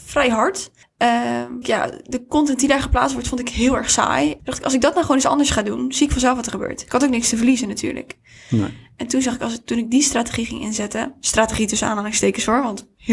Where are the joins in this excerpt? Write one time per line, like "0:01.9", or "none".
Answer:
0:01.6
0:04.4